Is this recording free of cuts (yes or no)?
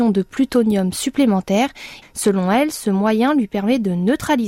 no